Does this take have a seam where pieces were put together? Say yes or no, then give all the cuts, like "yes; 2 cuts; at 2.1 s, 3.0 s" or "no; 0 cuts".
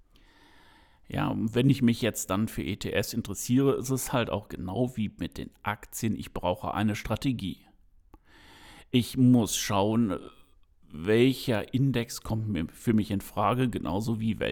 no; 0 cuts